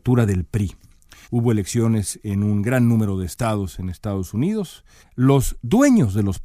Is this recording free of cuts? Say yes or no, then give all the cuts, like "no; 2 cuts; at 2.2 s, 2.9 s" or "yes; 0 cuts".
no; 2 cuts; at 1.2 s, 5.0 s